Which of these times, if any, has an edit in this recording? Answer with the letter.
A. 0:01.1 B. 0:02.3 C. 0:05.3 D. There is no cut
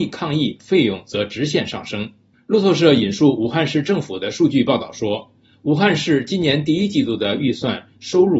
B